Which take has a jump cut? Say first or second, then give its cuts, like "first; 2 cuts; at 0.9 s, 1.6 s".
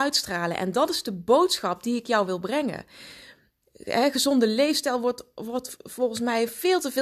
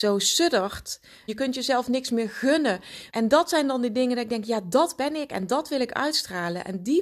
second; 2 cuts; at 1.3 s, 3.1 s